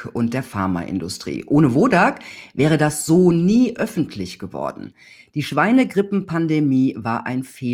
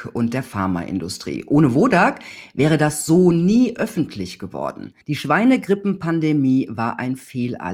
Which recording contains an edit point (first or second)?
second